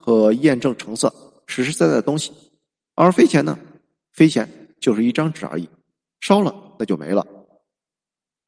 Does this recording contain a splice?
no; 0 cuts

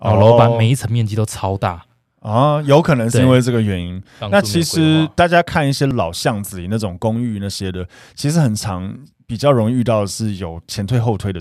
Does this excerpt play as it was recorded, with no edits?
yes; 0 cuts

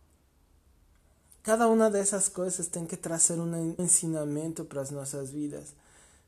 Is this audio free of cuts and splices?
no; 1 cut; at 3.8 s

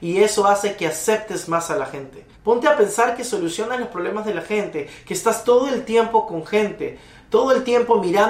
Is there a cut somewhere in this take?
yes; 1 cut; at 2.3 s

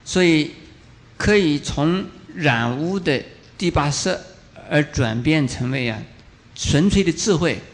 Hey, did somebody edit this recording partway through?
no; 0 cuts

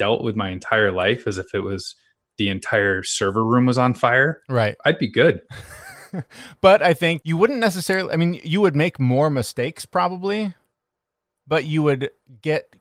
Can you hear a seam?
no; 0 cuts

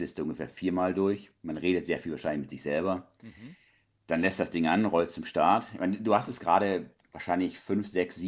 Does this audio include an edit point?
no; 0 cuts

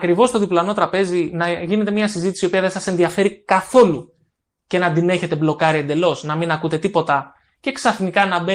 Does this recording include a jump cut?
no; 0 cuts

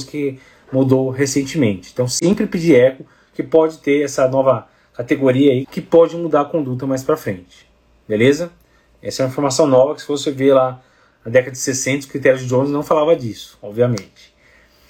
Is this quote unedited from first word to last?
no; 1 cut; at 5.6 s

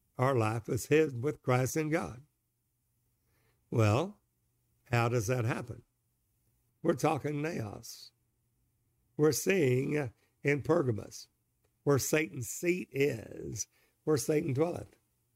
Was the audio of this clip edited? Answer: yes; 1 cut; at 6.7 s

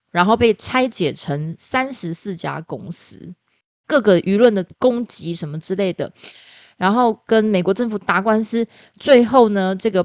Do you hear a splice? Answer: yes; 1 cut; at 3.8 s

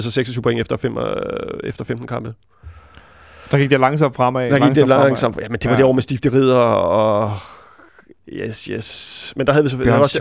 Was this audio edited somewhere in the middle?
no; 0 cuts

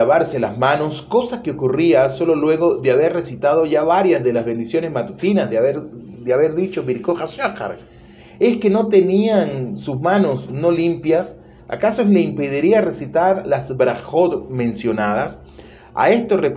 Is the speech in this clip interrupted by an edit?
no; 0 cuts

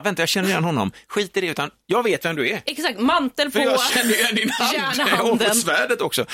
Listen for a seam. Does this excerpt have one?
no; 0 cuts

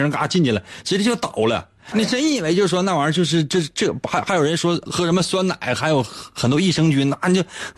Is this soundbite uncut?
no; 2 cuts; at 1.9 s, 4.9 s

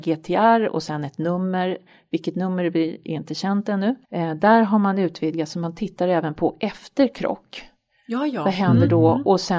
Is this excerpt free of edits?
no; 1 cut; at 4.0 s

